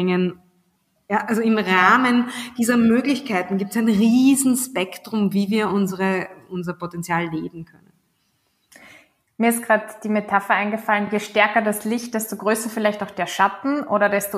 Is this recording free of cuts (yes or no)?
yes